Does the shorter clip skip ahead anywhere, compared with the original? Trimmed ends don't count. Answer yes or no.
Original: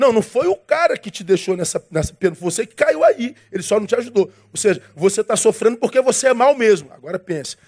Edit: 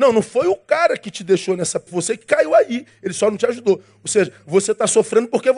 yes